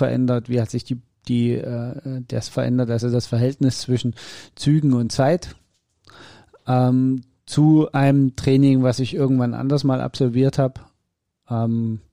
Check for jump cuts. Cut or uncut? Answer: cut